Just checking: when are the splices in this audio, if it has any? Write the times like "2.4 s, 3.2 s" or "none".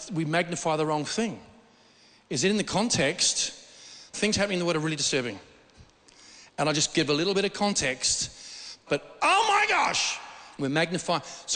4.1 s, 8.9 s, 10.6 s